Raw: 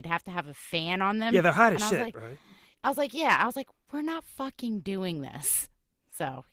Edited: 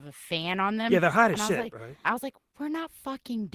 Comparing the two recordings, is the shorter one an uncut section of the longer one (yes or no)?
no